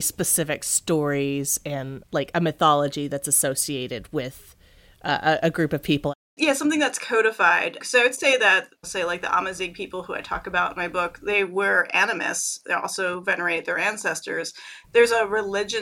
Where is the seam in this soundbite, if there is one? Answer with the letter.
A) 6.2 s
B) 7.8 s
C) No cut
A